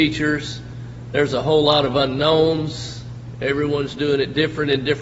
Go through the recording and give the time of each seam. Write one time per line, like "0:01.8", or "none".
none